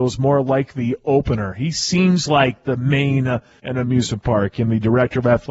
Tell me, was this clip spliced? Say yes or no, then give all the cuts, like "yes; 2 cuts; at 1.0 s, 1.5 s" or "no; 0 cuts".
yes; 1 cut; at 3.6 s